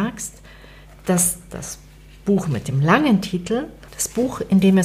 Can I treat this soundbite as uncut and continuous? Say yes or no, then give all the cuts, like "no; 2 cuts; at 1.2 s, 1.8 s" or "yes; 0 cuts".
no; 1 cut; at 3.9 s